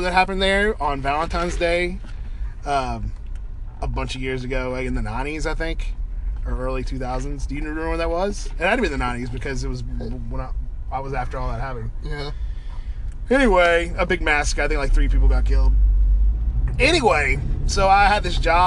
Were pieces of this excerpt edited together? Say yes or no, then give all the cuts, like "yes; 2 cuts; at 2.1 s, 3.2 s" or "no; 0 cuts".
no; 0 cuts